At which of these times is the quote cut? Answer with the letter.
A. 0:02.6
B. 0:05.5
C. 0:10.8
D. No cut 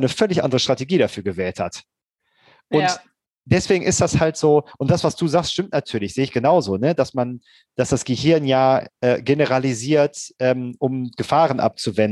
D